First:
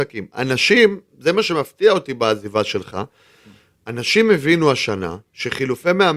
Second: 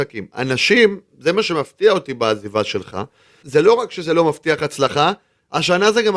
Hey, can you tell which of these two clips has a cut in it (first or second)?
second